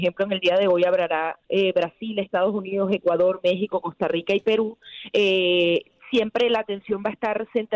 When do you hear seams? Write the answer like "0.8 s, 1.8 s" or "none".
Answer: 1.4 s